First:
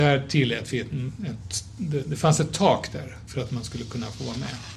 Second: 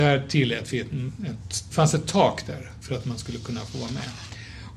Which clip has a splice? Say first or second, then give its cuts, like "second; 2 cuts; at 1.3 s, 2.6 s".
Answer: second; 1 cut; at 1.7 s